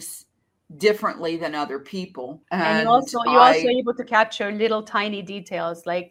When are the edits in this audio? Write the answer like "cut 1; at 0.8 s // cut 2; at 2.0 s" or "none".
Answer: cut 1; at 2.4 s